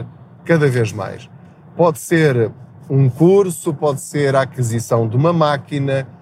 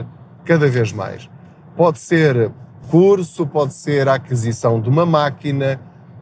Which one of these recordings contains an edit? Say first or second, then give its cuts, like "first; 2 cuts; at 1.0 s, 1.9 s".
second; 1 cut; at 2.8 s